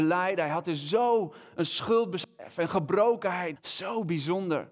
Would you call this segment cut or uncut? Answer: cut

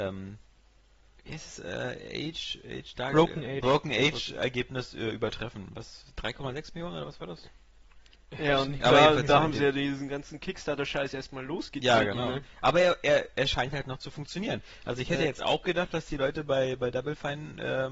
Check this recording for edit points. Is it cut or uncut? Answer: uncut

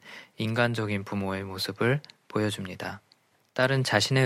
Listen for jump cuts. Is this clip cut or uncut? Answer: uncut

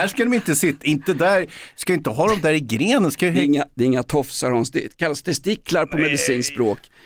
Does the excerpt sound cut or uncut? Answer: uncut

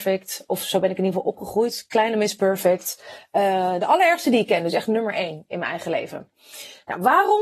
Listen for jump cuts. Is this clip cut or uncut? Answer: uncut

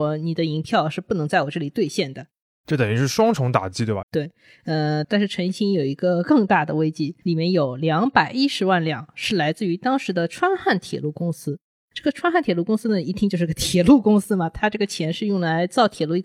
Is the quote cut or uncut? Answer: cut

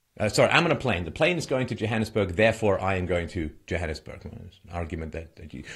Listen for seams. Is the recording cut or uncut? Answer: uncut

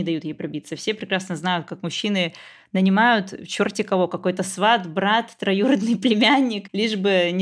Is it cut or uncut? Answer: uncut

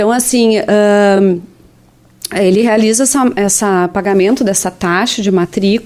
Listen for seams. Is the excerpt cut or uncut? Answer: uncut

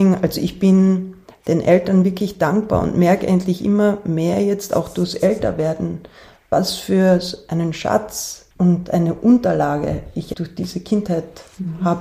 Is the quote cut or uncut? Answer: cut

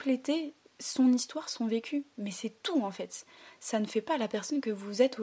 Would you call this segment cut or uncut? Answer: uncut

